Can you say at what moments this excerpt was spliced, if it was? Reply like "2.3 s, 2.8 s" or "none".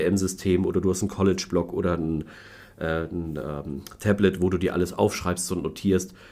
none